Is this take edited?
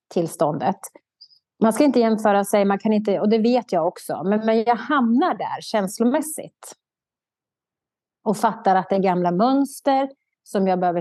no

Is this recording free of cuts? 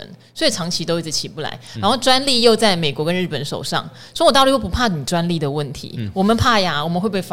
yes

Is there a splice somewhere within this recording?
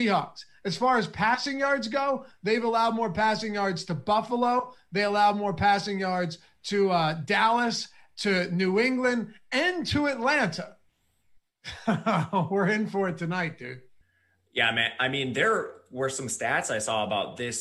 no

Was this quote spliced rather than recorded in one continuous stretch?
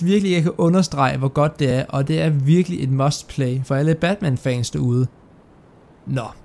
no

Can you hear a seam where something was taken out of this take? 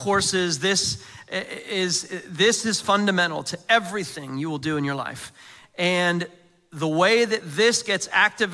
no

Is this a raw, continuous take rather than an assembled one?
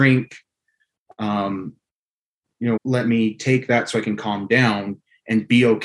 no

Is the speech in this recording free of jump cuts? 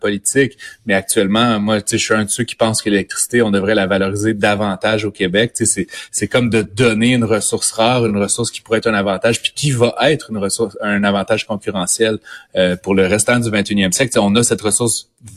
yes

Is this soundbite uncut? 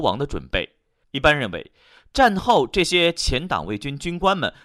no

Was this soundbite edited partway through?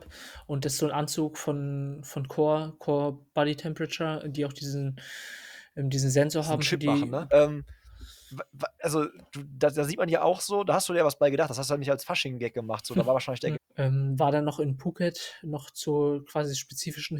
yes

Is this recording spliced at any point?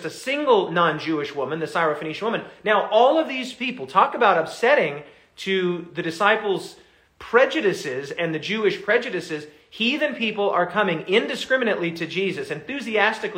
no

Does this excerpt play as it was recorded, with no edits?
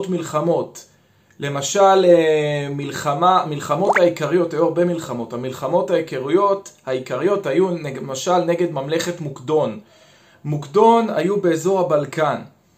yes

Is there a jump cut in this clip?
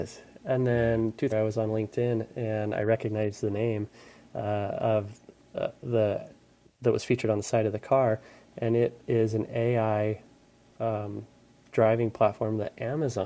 yes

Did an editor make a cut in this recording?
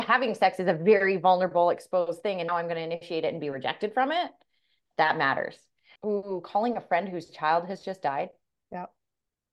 yes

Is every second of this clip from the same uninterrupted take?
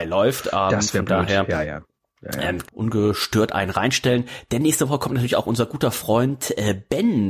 no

